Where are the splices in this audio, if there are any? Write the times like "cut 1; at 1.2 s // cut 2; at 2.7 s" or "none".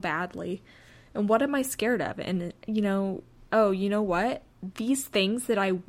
cut 1; at 3.5 s